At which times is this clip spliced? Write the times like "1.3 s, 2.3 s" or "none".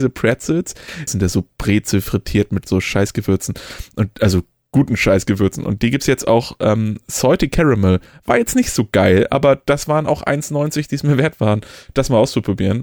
1.1 s